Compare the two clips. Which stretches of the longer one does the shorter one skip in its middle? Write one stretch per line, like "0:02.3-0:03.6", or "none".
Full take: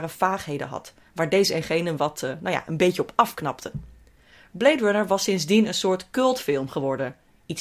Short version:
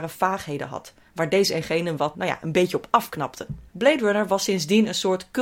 0:02.1-0:02.4
0:03.9-0:04.5